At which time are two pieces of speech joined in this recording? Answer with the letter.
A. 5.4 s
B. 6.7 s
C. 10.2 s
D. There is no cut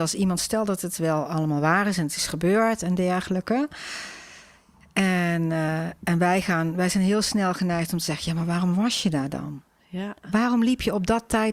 D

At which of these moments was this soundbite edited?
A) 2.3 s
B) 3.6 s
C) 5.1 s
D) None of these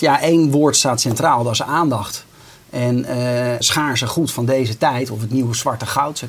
B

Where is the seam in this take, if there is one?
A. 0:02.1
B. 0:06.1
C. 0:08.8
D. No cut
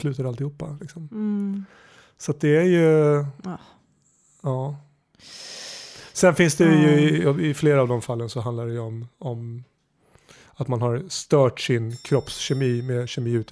D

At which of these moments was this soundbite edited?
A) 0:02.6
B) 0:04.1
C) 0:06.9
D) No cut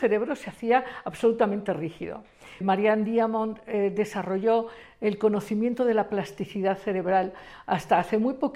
A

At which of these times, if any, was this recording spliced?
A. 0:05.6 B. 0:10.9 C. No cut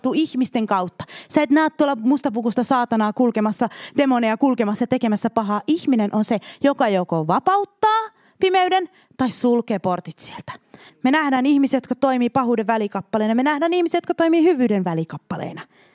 B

